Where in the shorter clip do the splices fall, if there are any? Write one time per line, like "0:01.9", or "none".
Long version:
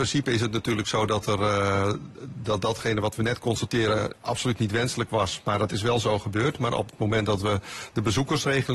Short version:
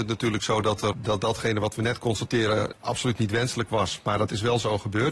0:00.9